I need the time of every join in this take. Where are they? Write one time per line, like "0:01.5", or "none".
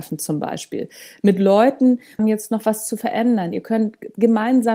0:02.2